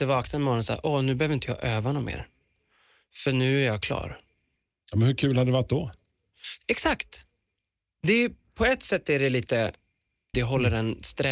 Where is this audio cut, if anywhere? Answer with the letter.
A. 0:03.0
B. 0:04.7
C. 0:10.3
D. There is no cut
C